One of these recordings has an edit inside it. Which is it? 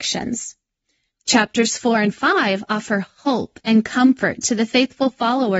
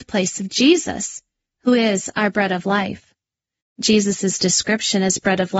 first; 1 cut; at 1.1 s

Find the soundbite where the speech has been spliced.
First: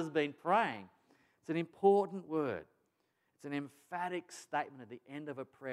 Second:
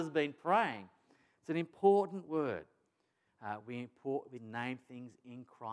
second; 2 cuts; at 3.3 s, 4.4 s

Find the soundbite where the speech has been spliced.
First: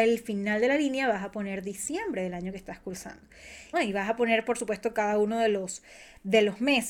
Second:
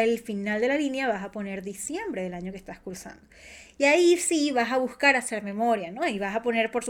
first; 1 cut; at 3.7 s

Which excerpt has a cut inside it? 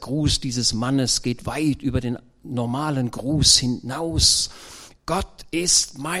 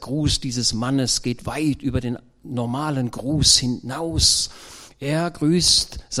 first; 1 cut; at 4.9 s

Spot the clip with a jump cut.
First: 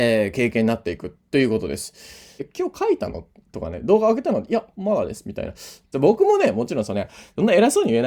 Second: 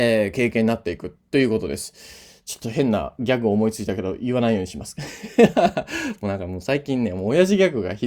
first; 2 cuts; at 2.4 s, 5.9 s

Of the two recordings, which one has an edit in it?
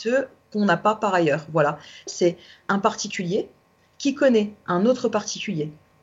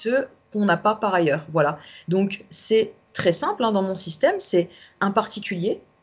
first; 1 cut; at 2.1 s

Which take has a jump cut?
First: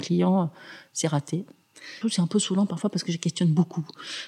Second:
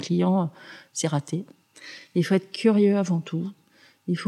first; 1 cut; at 2.0 s

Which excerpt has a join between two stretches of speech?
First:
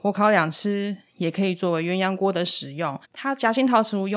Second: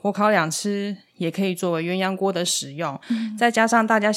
first; 1 cut; at 3.0 s

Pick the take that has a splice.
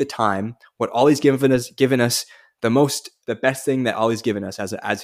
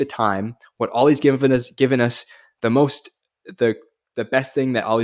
first; 1 cut; at 3.2 s

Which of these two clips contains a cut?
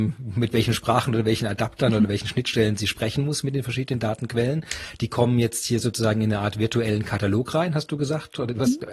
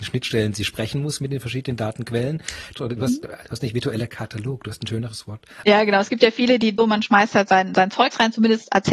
second; 3 cuts; at 2.7 s, 5.6 s, 6.8 s

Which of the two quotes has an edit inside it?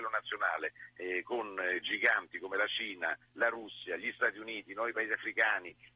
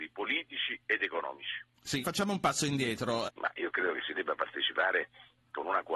second; 2 cuts; at 2.0 s, 3.3 s

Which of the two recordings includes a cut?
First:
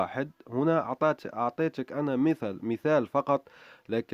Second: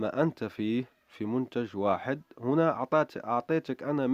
first; 1 cut; at 2.6 s

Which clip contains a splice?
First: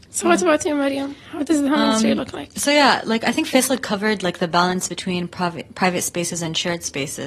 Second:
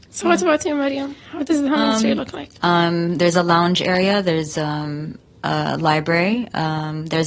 second; 1 cut; at 2.6 s

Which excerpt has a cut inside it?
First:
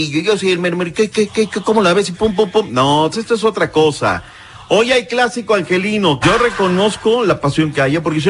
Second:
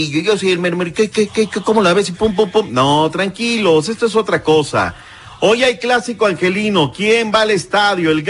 first; 2 cuts; at 3.1 s, 6.2 s

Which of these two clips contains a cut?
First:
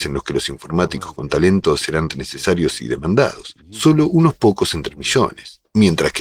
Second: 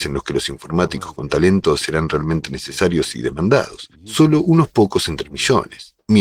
first; 1 cut; at 2.1 s

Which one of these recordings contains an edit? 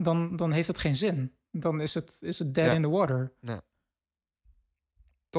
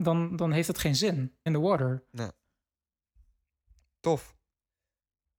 second; 1 cut; at 1.5 s

